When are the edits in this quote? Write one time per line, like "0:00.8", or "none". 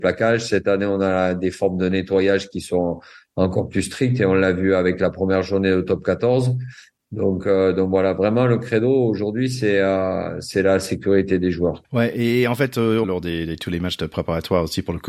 0:11.8
0:13.0